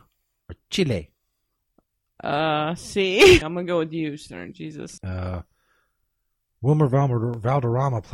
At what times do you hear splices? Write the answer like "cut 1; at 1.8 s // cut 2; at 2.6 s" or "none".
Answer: cut 1; at 3.4 s // cut 2; at 5.0 s